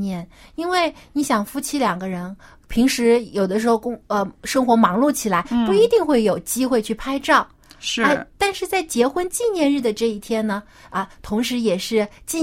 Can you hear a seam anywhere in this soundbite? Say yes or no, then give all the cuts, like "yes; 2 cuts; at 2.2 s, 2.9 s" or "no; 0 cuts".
no; 0 cuts